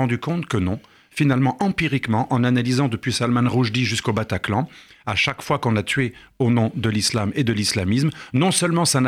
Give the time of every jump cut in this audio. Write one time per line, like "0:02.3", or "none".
none

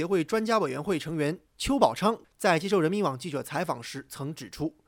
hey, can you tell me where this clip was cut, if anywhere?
0:01.5

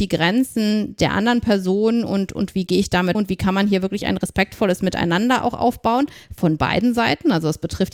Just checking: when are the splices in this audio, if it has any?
0:03.1

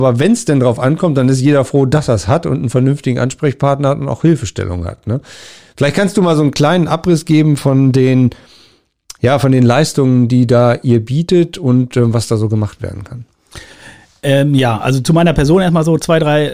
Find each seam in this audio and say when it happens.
none

